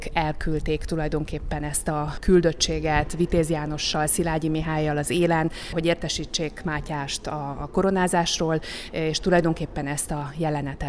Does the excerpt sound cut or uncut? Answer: uncut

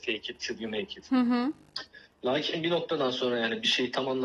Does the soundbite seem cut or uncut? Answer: uncut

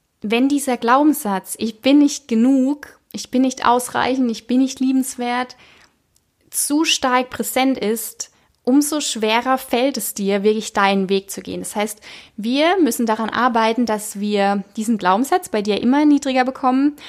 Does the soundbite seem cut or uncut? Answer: uncut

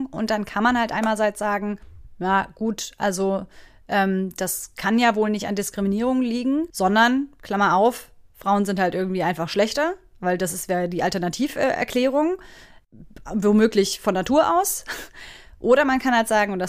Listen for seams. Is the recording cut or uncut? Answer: cut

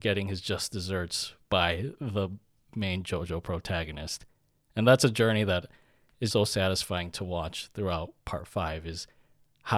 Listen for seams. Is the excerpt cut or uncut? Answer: cut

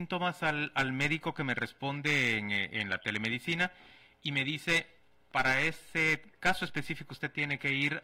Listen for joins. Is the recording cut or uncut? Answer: uncut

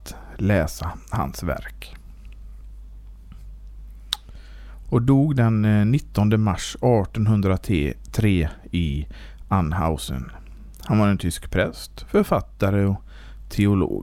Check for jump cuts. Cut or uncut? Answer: cut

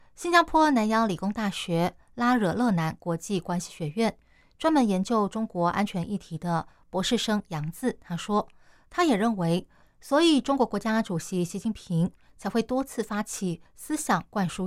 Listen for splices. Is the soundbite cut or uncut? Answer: cut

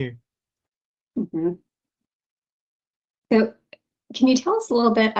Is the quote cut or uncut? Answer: uncut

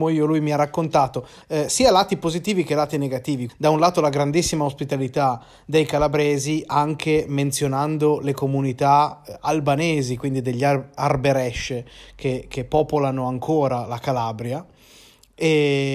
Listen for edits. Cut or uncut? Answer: cut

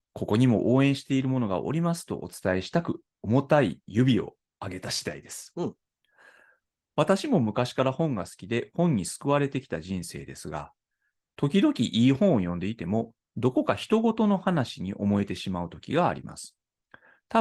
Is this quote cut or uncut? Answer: cut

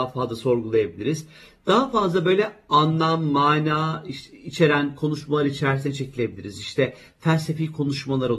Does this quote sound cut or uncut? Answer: uncut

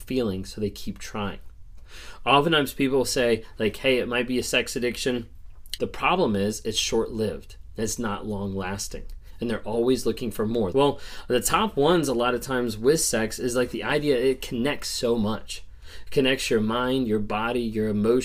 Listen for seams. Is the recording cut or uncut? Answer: cut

